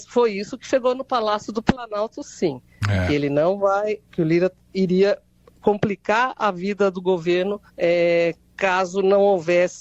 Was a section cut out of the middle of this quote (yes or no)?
yes